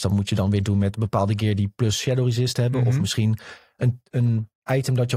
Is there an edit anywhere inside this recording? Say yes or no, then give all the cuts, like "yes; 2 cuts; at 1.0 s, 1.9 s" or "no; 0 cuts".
no; 0 cuts